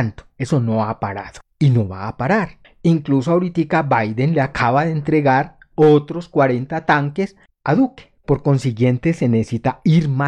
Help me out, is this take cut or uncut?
cut